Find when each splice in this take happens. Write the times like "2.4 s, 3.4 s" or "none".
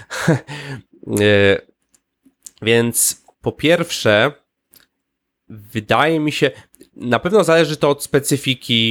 3.3 s

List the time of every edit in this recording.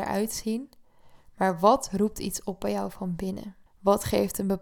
3.7 s

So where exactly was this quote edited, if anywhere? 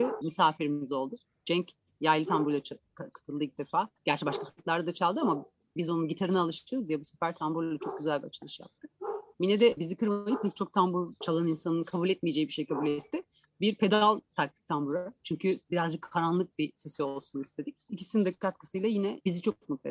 4.0 s

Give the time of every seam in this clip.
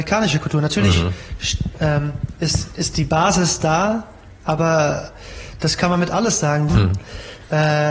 6.7 s

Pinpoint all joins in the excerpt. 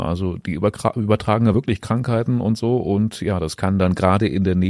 none

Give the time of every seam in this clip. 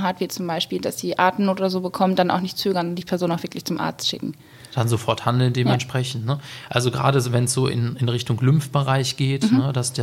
none

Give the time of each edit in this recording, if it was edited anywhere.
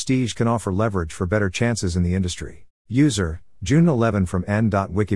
2.8 s

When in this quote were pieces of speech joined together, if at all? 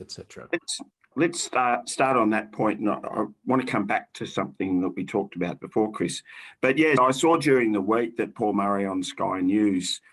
5.6 s, 7.0 s

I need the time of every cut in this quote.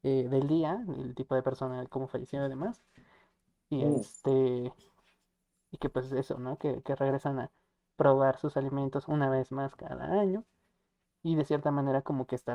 none

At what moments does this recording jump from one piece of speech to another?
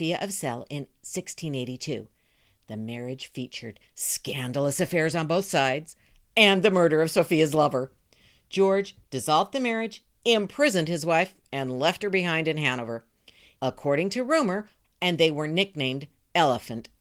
13.6 s, 14.8 s

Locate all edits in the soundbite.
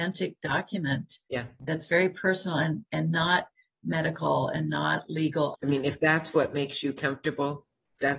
1.6 s, 5.5 s

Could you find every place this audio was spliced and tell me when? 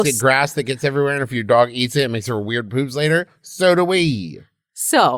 none

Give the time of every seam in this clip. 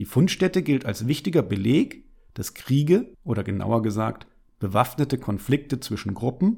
3.1 s

